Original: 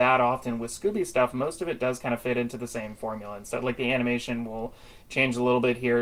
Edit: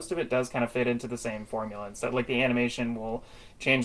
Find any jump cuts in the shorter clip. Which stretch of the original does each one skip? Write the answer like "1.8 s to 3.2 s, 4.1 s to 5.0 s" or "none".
none